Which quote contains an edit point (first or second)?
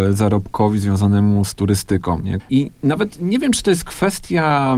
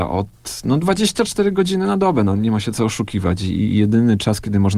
first